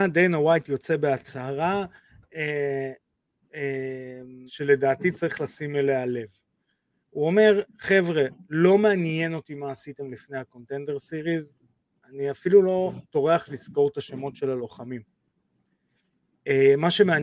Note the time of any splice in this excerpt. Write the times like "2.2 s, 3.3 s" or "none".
4.5 s

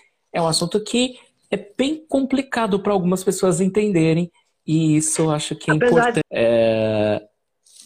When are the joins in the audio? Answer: 6.2 s

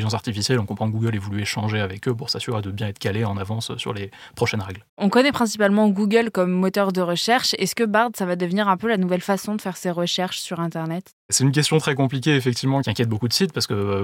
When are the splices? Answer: none

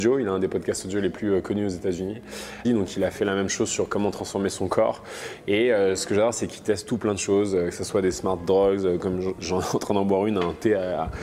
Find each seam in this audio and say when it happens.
2.6 s

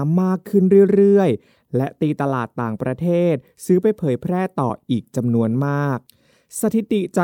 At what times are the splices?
none

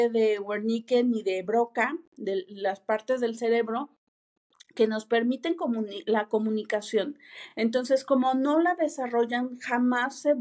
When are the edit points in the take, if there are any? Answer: none

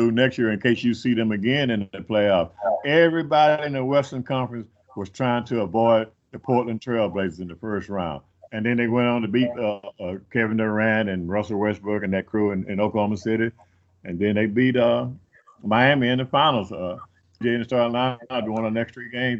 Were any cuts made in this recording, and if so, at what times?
2.8 s, 8.5 s, 17.4 s

